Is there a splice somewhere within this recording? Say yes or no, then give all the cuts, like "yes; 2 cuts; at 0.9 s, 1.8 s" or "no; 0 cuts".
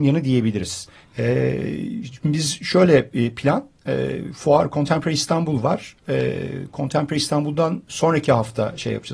yes; 1 cut; at 1.0 s